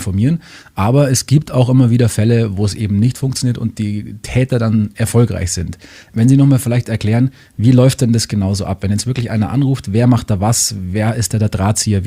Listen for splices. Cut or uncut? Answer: uncut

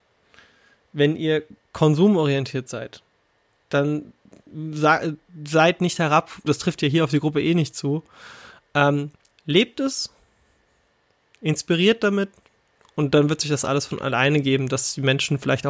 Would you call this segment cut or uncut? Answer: cut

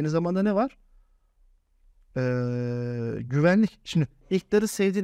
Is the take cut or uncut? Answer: uncut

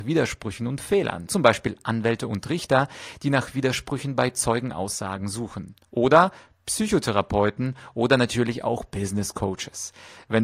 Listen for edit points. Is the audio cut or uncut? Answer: cut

